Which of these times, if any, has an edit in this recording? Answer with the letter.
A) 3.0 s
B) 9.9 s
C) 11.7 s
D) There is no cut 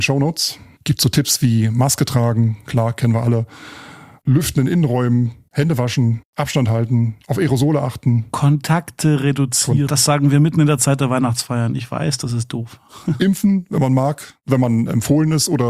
B